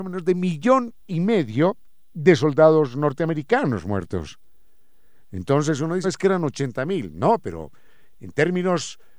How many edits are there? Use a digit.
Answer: 1